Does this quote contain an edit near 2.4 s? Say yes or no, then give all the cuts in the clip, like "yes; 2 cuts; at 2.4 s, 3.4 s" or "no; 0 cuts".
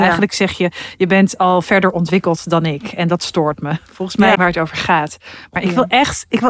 no; 1 cut; at 4.3 s